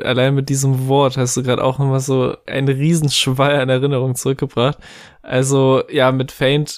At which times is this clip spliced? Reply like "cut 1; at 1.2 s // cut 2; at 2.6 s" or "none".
none